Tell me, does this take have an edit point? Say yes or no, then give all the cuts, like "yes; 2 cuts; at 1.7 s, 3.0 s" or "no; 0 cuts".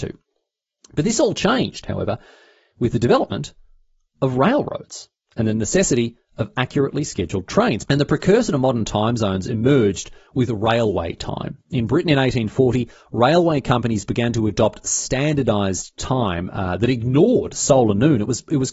yes; 1 cut; at 7.8 s